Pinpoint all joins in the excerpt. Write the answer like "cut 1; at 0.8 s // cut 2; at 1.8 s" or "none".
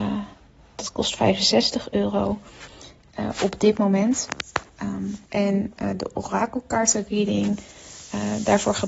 cut 1; at 5.3 s